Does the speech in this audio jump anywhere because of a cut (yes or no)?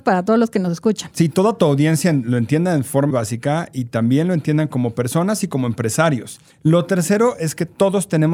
yes